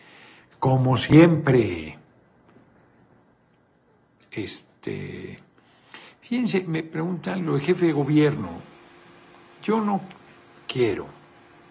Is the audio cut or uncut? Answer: uncut